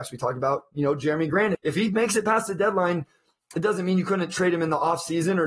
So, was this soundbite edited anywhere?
yes; 1 cut; at 1.5 s

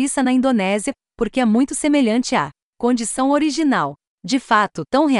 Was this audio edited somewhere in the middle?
no; 0 cuts

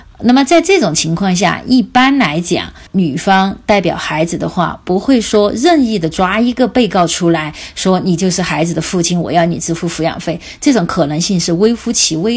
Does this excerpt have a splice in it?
no; 0 cuts

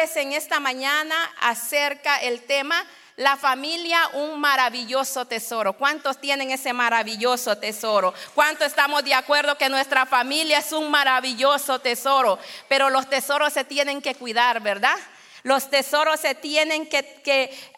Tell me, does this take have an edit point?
no; 0 cuts

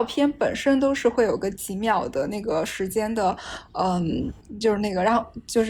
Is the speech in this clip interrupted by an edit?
no; 0 cuts

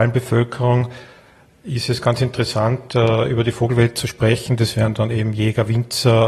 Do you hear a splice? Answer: no; 0 cuts

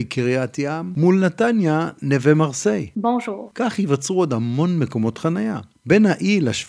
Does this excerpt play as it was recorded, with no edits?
yes; 0 cuts

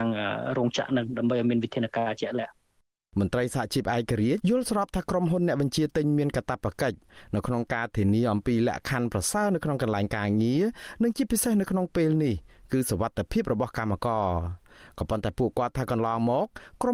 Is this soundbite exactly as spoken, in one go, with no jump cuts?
no; 1 cut; at 4.4 s

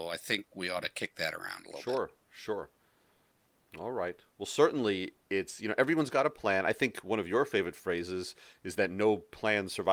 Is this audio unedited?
yes; 0 cuts

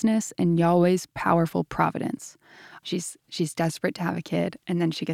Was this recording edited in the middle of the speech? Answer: yes; 1 cut; at 2.8 s

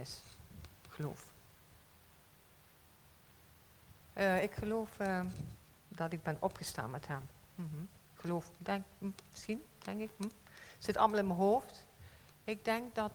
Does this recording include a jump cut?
no; 0 cuts

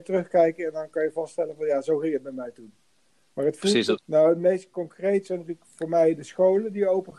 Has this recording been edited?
yes; 1 cut; at 4.0 s

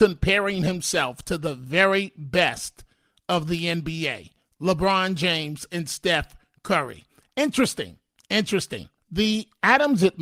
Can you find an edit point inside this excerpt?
yes; 1 cut; at 9.0 s

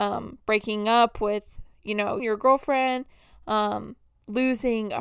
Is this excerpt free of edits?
no; 1 cut; at 2.2 s

